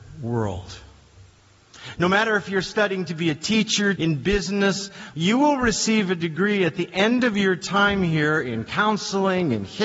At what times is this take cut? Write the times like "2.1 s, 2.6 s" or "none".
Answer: 4.0 s, 5.1 s